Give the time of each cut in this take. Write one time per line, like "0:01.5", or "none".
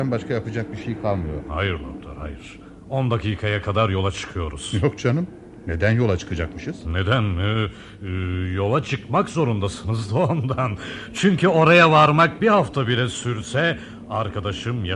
none